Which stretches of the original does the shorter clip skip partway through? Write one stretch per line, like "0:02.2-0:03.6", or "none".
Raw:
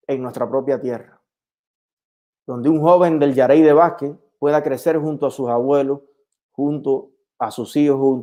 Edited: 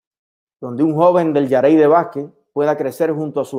none